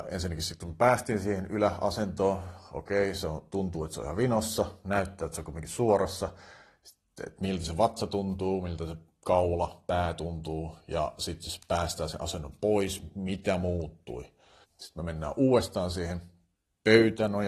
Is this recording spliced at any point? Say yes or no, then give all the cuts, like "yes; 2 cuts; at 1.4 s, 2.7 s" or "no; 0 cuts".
yes; 1 cut; at 14.6 s